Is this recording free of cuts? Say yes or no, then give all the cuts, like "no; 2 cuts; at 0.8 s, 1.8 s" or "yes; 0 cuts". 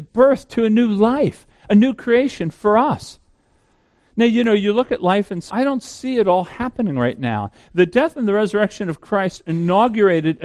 no; 2 cuts; at 5.5 s, 7.6 s